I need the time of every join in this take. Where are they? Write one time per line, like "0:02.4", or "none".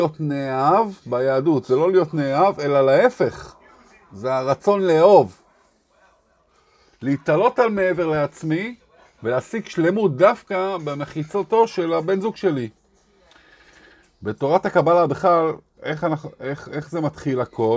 0:15.8